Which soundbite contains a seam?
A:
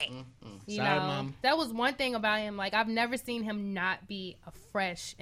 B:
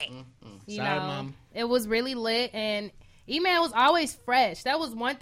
A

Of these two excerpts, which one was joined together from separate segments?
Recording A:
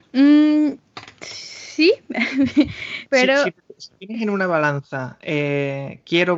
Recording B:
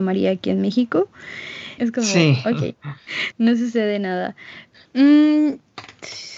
B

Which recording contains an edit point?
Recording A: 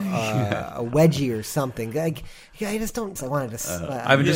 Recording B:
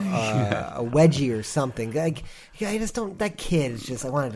A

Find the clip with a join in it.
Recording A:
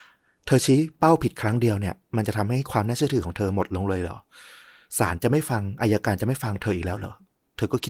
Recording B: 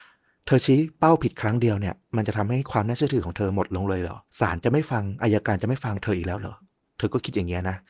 B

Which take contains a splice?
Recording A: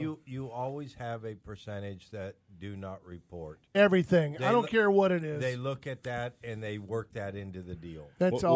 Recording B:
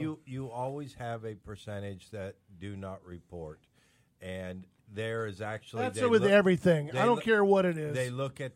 A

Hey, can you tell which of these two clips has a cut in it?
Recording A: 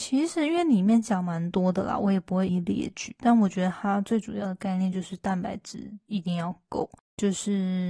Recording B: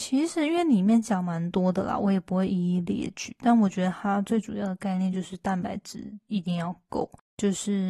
A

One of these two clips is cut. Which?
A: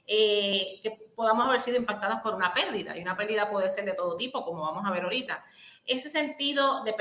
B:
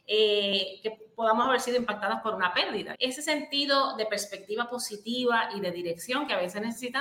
B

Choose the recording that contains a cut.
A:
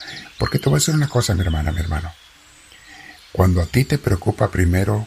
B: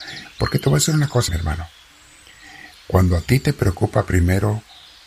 B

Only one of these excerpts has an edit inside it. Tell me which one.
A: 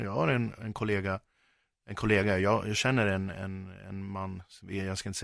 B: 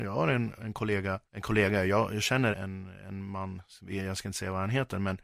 B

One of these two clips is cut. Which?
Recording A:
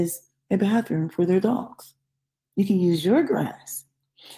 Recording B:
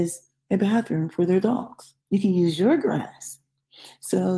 B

